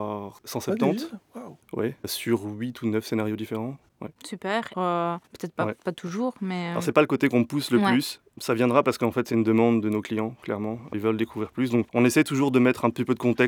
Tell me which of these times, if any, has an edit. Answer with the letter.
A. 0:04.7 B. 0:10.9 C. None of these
A